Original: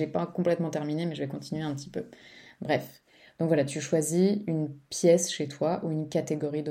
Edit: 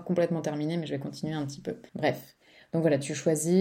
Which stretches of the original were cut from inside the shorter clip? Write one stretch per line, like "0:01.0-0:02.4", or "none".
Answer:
0:02.2-0:02.6